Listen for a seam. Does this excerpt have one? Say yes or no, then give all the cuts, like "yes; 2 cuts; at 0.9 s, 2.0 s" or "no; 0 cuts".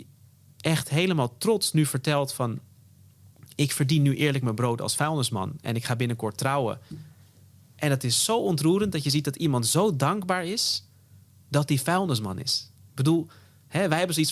yes; 1 cut; at 6.9 s